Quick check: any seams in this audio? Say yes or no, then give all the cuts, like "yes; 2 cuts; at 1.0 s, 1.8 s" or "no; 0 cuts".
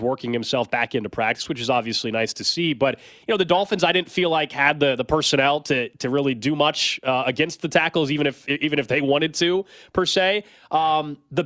no; 0 cuts